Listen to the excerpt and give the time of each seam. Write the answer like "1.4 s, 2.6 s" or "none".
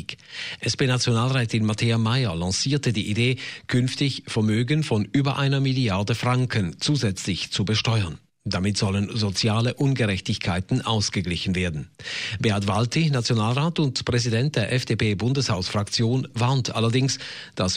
none